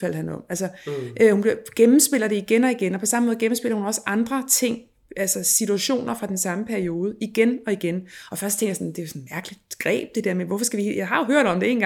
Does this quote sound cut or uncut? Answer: uncut